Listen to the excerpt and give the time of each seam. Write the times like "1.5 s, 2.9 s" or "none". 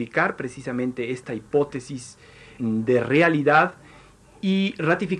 2.6 s

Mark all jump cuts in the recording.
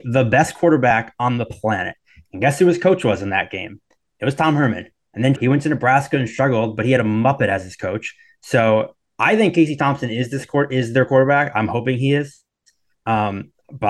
5.4 s

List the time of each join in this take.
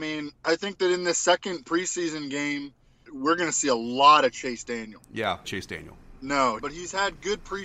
3.1 s, 5.4 s, 6.6 s

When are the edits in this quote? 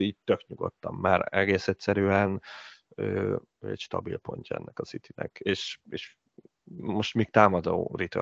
none

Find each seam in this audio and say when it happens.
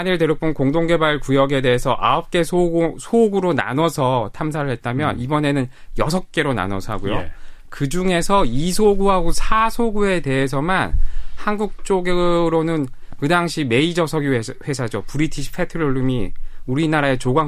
none

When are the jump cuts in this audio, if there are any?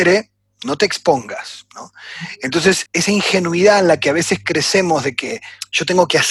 2.9 s

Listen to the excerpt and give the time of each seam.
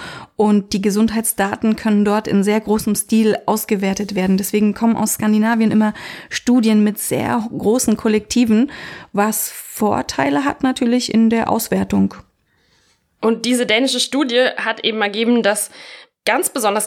none

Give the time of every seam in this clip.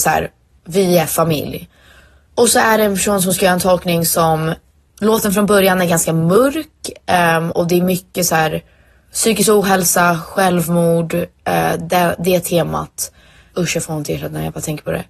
none

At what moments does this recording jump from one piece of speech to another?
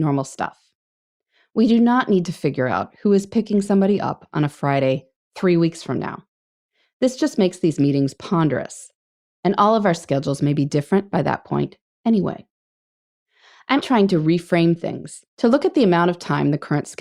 13.8 s, 15.3 s

